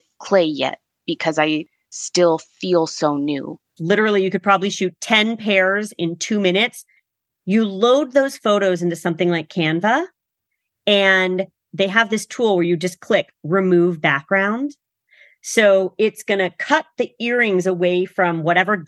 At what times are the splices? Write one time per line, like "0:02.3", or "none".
0:03.8